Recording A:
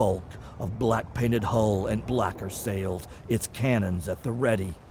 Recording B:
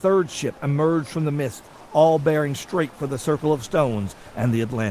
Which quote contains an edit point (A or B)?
A